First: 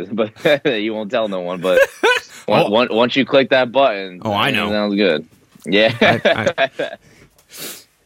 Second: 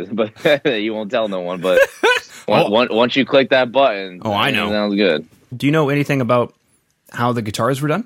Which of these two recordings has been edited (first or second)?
second